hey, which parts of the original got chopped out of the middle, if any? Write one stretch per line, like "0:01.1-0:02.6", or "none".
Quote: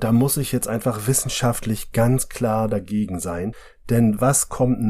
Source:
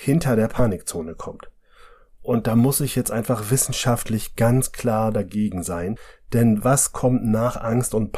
none

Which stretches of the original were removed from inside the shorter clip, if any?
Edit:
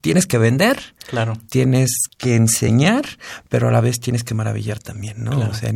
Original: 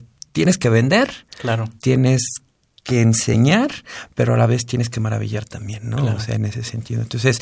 0:02.4-0:02.7

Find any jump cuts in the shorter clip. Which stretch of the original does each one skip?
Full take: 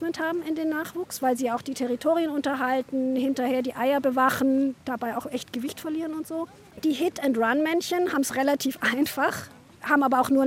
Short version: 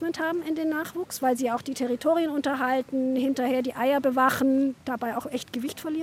none

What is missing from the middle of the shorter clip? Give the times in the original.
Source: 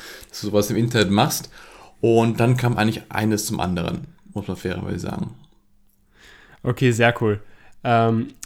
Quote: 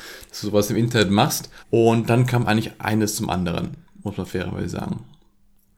0:01.6-0:01.9

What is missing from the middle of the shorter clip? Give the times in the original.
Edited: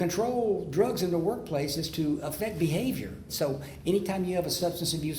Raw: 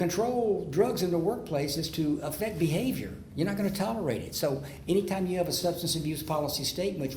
0:03.3-0:04.3

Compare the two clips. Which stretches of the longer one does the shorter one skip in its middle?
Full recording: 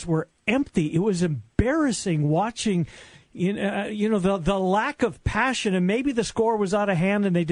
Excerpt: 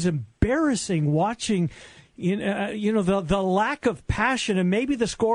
none

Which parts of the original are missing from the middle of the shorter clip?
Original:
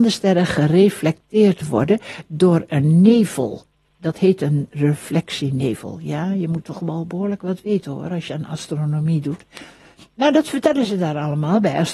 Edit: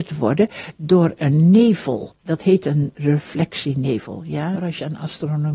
0:03.7-0:03.9
0:06.3-0:08.0

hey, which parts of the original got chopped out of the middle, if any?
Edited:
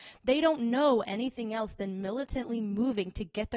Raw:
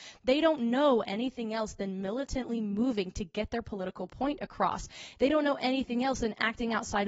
none

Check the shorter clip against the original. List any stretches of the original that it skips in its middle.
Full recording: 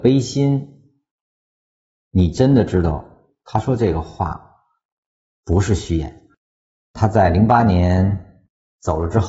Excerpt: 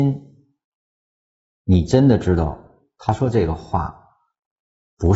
none

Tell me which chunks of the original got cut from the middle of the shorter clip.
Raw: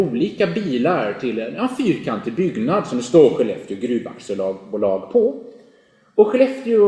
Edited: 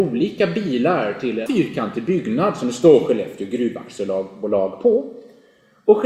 0:01.5-0:01.8

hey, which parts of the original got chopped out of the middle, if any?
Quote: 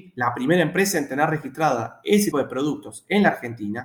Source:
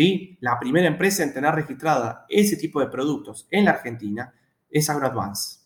0:02.6-0:02.7

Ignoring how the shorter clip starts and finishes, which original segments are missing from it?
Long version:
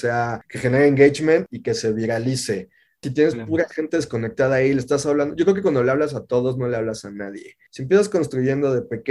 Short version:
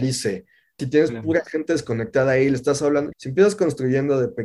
0:05.4-0:07.7

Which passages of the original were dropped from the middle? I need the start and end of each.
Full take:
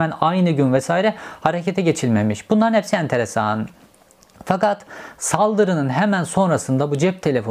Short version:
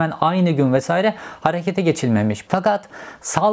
0:02.5-0:04.4

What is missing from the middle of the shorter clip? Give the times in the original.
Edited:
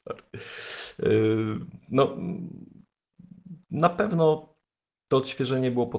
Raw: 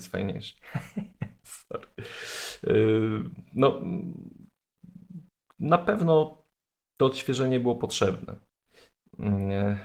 0:05.3-0:05.5

